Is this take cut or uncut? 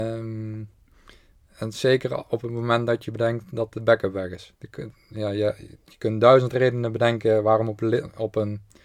cut